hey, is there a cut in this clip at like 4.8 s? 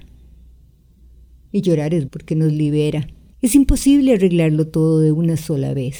no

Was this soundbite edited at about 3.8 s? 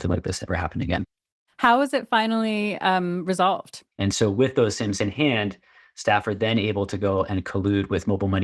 yes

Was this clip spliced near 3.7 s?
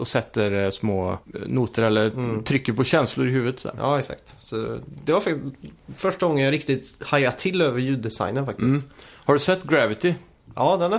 no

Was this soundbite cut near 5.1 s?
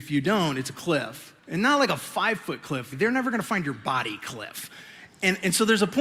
no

